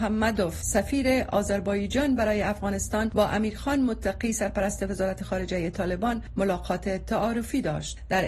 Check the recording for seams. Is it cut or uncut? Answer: uncut